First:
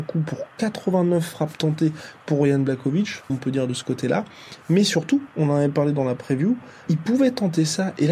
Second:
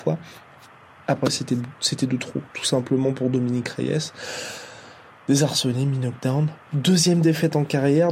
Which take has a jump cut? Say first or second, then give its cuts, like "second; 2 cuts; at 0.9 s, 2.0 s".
first; 3 cuts; at 3.3 s, 5.3 s, 6.9 s